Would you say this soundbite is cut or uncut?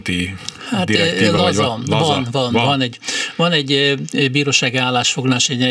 uncut